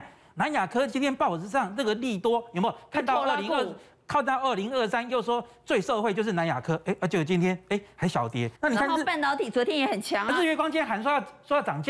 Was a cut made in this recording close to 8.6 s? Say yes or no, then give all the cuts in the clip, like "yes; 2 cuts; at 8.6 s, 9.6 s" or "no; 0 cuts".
yes; 1 cut; at 8.6 s